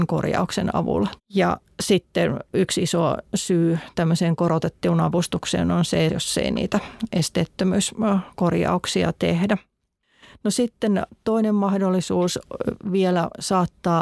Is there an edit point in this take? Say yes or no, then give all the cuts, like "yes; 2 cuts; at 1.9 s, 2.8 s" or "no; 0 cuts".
yes; 2 cuts; at 1.2 s, 6.1 s